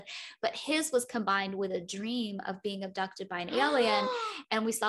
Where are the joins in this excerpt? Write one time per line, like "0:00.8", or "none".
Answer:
none

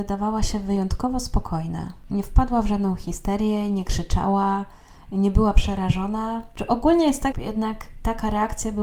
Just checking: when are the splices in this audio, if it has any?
0:07.3

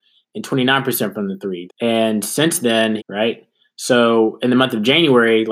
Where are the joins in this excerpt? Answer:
0:01.7
0:03.0

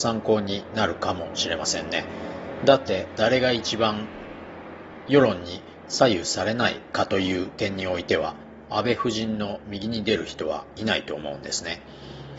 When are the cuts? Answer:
0:03.1

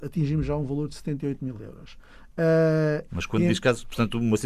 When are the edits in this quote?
0:03.1

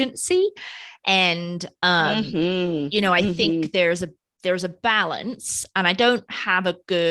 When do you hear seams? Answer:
none

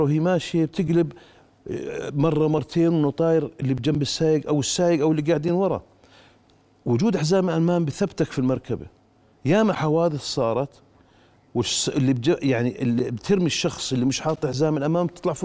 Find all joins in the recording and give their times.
none

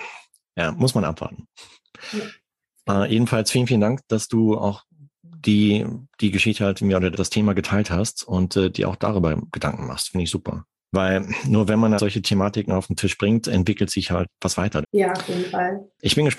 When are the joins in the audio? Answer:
0:07.1
0:12.0
0:14.8

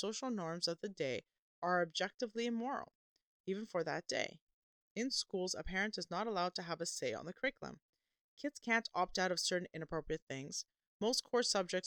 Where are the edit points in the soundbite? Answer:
none

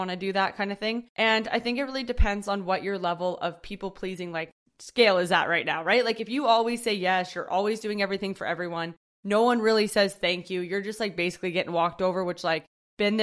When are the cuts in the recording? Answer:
none

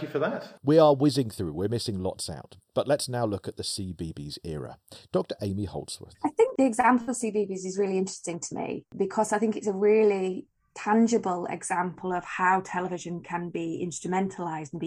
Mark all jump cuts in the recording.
0:05.1

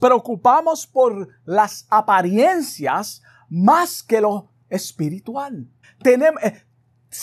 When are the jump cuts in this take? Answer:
0:05.8

